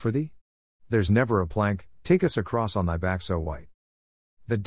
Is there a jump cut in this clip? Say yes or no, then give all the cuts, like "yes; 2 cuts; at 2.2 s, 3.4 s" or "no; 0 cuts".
yes; 1 cut; at 1.9 s